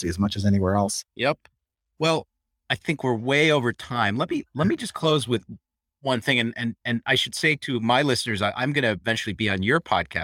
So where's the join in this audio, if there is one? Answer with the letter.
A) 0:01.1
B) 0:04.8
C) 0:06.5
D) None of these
A